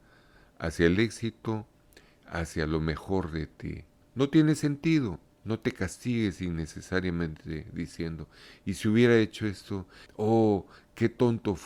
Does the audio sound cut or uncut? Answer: cut